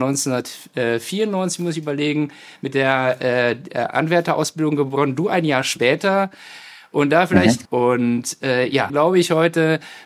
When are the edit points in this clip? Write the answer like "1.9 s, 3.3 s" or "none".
7.7 s, 8.9 s